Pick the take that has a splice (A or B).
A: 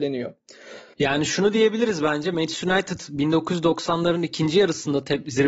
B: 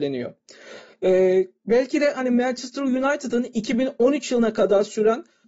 A